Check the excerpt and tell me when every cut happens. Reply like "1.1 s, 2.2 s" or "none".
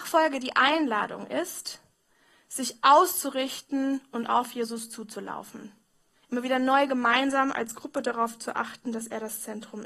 6.1 s